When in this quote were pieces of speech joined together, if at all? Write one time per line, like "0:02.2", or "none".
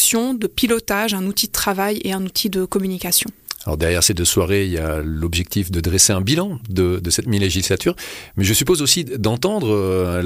none